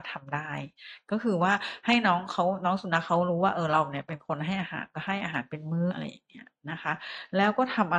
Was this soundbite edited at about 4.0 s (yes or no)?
no